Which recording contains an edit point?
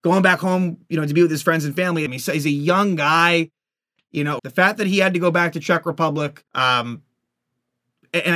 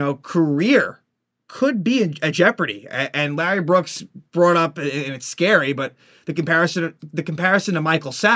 first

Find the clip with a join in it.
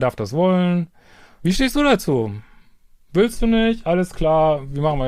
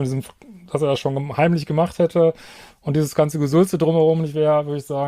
first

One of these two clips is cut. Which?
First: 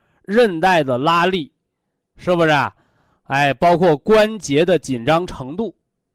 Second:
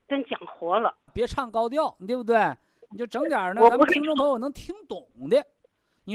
second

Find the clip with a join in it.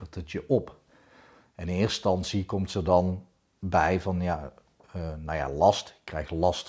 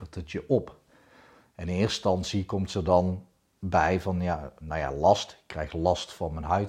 second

